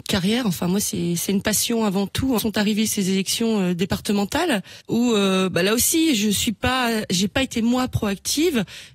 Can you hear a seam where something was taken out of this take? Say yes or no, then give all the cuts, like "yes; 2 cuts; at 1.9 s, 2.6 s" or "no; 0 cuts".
yes; 2 cuts; at 2.4 s, 4.8 s